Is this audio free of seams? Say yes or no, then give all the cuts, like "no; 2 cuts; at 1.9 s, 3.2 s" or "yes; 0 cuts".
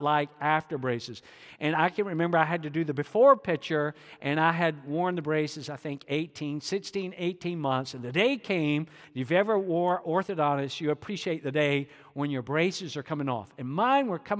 yes; 0 cuts